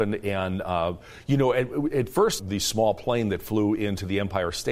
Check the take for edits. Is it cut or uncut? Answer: cut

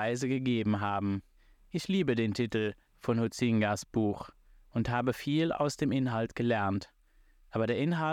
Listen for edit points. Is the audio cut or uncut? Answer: uncut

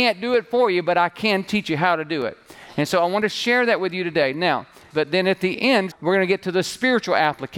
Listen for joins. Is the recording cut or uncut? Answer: cut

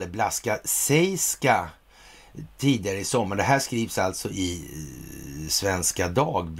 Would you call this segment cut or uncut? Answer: uncut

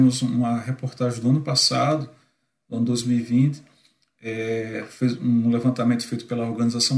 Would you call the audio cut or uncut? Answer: uncut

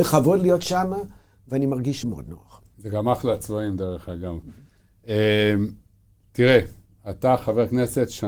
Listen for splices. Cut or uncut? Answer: cut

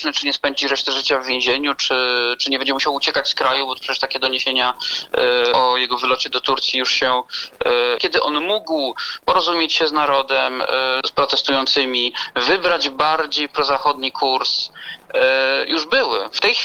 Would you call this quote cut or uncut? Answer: cut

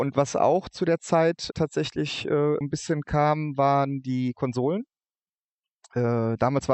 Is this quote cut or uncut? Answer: cut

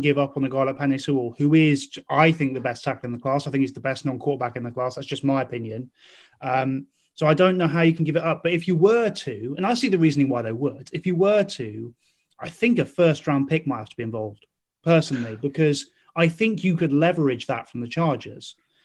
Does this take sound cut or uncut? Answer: uncut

